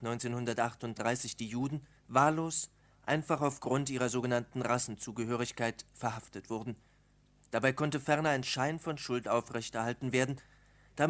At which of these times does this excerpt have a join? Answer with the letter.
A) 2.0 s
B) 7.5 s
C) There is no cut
A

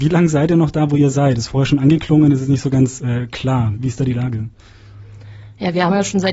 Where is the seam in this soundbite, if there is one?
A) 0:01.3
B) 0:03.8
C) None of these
C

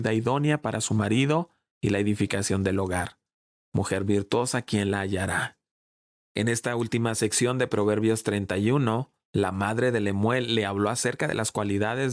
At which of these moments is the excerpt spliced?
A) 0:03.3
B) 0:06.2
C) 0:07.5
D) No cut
D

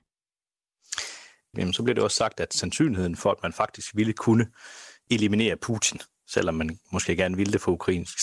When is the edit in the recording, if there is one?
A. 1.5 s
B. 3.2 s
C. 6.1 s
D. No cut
A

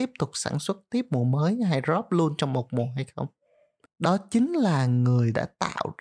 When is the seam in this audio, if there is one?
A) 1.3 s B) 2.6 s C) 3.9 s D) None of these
C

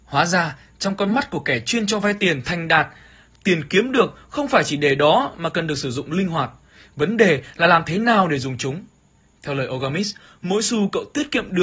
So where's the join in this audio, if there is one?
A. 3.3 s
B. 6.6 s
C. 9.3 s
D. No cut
D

